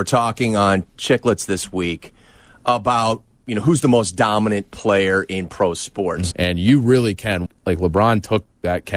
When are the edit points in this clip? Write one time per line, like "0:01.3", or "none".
0:06.3
0:07.5